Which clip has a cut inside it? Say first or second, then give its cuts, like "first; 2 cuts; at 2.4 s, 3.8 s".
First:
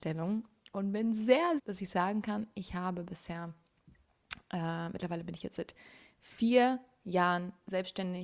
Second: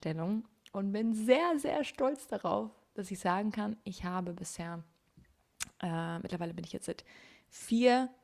first; 1 cut; at 1.6 s